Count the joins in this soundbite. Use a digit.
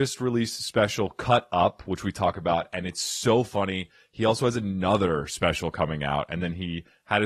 0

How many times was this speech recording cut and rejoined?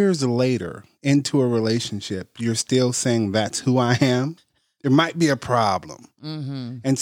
1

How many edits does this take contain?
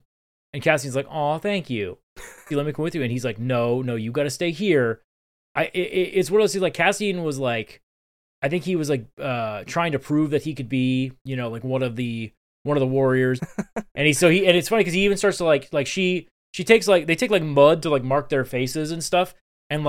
2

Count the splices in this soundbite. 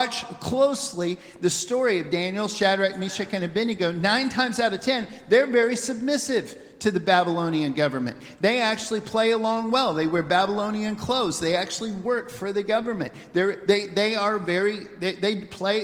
0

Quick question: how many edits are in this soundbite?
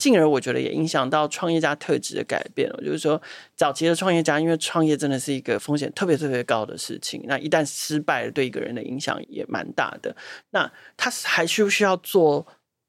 2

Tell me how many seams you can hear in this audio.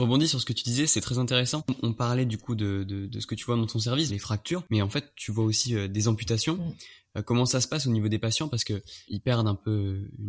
1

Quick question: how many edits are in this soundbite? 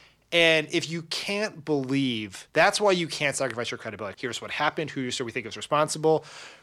2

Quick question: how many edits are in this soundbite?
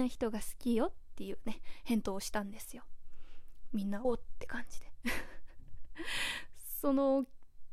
1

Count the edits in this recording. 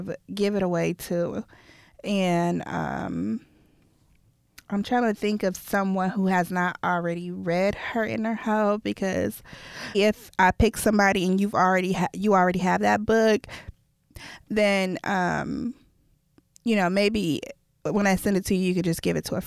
1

